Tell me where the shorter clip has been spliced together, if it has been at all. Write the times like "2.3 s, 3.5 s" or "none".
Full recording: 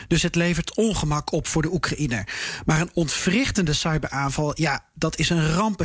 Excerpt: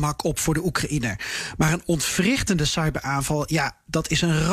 none